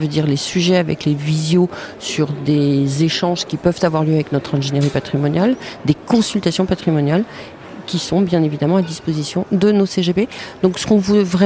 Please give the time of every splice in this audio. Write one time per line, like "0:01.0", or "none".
none